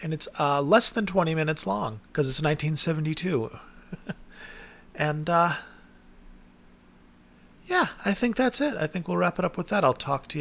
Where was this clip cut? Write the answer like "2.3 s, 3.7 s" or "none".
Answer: 2.1 s